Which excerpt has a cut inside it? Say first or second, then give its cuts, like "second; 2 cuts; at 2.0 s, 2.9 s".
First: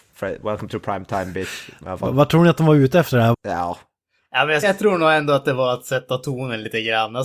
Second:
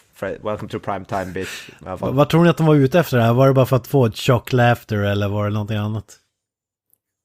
first; 2 cuts; at 3.3 s, 4.6 s